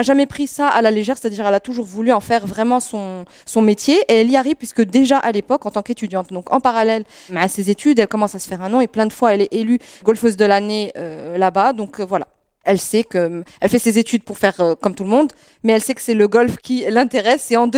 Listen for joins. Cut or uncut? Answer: uncut